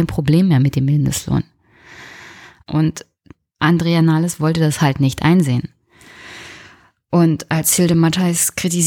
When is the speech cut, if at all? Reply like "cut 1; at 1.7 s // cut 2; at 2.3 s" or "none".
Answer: cut 1; at 2.6 s

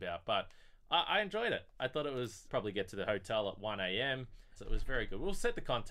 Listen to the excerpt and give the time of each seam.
cut 1; at 2.5 s // cut 2; at 4.6 s

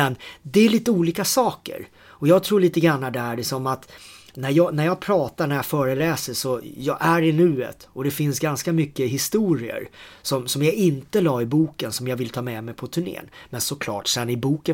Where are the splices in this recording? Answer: none

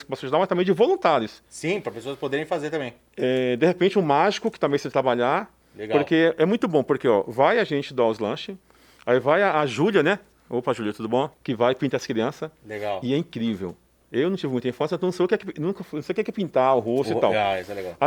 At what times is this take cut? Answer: cut 1; at 11.4 s

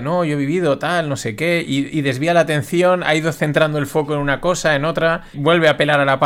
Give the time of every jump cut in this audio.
cut 1; at 5.3 s

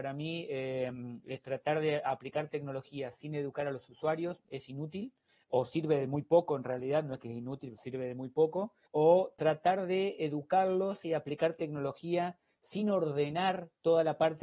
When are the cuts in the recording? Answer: none

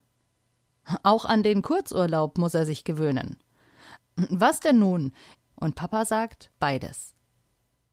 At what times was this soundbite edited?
cut 1; at 4.0 s // cut 2; at 5.4 s // cut 3; at 6.5 s

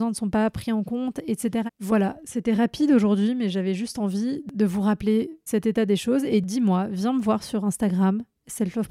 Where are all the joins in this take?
cut 1; at 1.7 s // cut 2; at 5.5 s

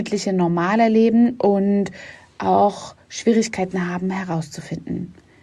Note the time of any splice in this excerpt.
none

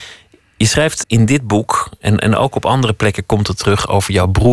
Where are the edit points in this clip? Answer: cut 1; at 1.0 s

